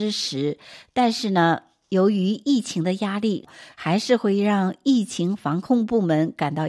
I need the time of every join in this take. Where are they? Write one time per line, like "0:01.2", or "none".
0:03.7